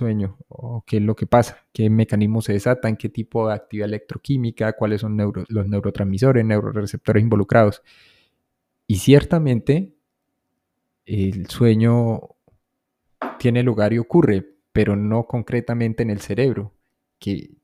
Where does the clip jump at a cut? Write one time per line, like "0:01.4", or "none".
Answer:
none